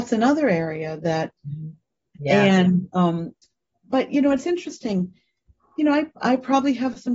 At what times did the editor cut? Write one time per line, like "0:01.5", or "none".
0:02.1